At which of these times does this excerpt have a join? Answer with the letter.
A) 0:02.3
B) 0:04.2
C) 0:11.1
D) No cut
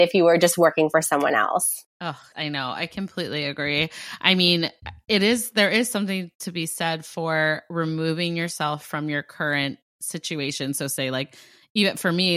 A